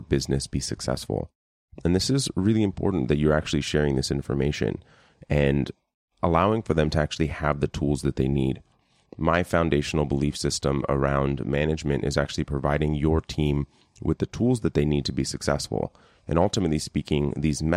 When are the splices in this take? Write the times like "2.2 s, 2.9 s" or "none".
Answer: none